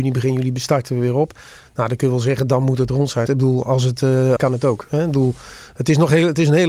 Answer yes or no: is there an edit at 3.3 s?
yes